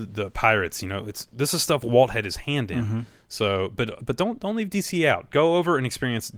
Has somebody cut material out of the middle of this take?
no; 0 cuts

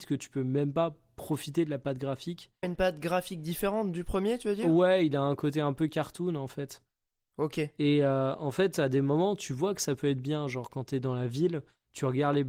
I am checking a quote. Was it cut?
yes; 1 cut; at 2.6 s

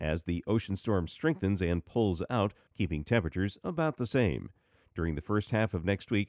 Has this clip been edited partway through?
yes; 1 cut; at 2.7 s

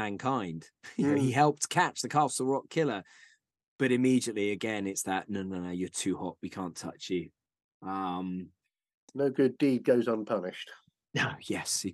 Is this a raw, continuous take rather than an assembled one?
yes; 0 cuts

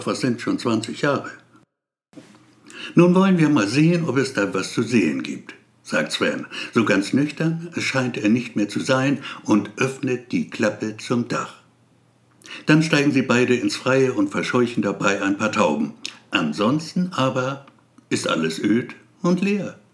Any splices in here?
yes; 1 cut; at 4.5 s

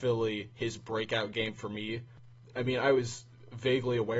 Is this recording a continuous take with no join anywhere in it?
yes; 0 cuts

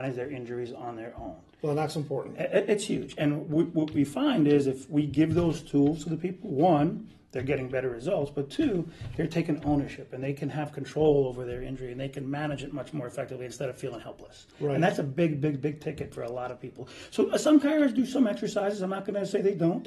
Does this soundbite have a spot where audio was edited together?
no; 0 cuts

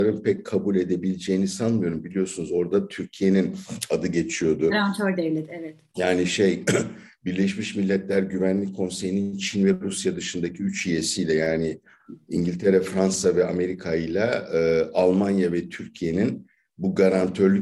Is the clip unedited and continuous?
yes; 0 cuts

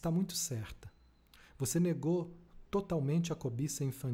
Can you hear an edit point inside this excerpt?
no; 0 cuts

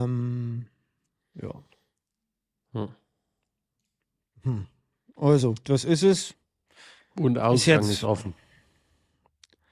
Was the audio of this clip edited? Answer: no; 0 cuts

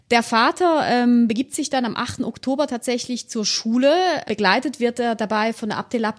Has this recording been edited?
no; 0 cuts

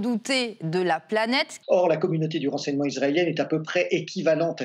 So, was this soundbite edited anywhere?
yes; 1 cut; at 1.6 s

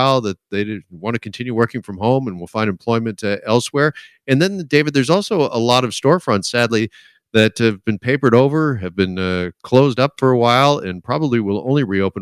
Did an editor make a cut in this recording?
no; 0 cuts

